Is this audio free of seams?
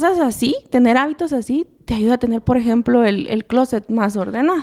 yes; 0 cuts

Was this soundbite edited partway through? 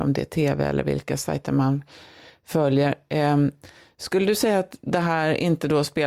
no; 0 cuts

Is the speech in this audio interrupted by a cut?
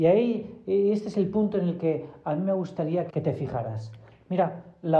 yes; 1 cut; at 3.1 s

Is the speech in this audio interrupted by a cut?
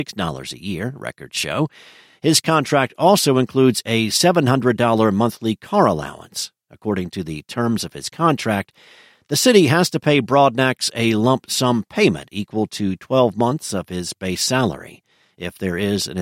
no; 0 cuts

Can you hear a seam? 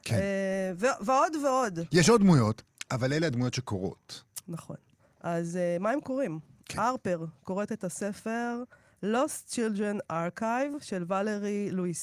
no; 0 cuts

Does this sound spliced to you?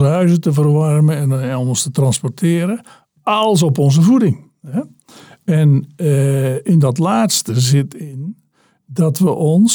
no; 0 cuts

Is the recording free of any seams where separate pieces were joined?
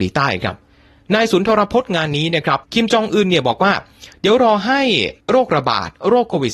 no; 2 cuts; at 2.6 s, 5.2 s

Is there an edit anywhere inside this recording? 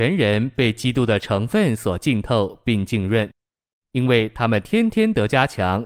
no; 0 cuts

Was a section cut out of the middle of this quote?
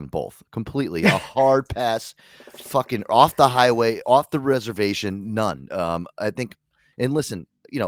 no; 0 cuts

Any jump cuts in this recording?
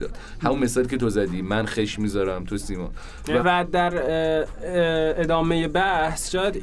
yes; 1 cut; at 3.4 s

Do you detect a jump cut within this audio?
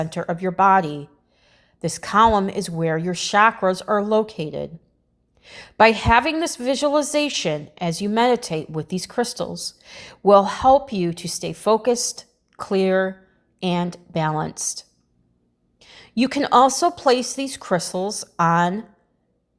no; 0 cuts

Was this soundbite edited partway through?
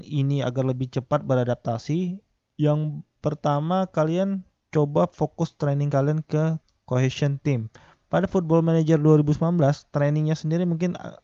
no; 0 cuts

